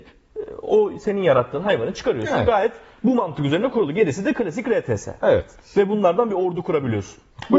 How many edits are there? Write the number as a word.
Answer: zero